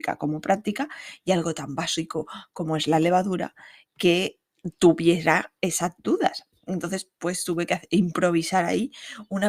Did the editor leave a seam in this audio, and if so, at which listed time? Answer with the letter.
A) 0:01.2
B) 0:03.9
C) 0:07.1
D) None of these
D